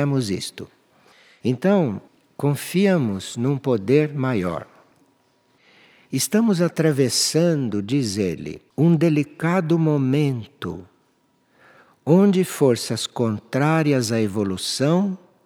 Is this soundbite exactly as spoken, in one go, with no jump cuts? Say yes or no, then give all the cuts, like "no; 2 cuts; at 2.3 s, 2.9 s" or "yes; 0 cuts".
yes; 0 cuts